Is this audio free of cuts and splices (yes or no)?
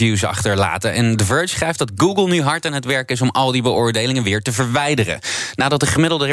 yes